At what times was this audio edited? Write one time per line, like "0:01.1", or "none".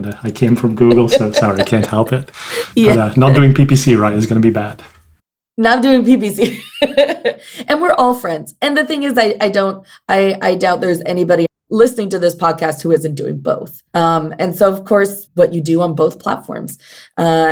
0:13.9
0:15.3